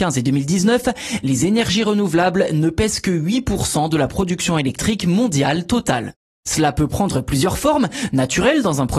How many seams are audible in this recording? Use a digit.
1